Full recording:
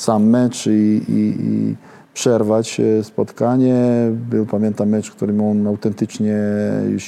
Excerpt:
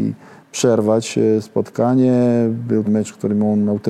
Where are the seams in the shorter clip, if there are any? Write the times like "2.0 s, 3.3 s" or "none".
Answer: 2.9 s